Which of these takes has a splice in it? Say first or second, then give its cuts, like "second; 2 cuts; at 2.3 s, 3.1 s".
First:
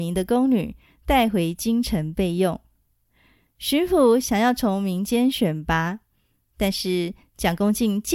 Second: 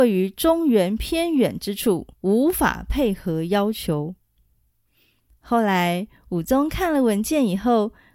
second; 1 cut; at 2.1 s